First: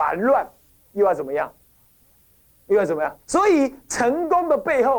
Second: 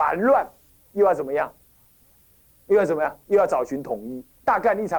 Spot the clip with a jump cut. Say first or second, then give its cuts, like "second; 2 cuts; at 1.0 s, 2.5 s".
first; 1 cut; at 3.2 s